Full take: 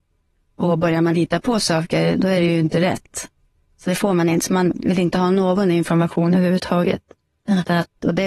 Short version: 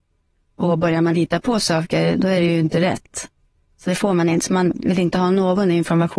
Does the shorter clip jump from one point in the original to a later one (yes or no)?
no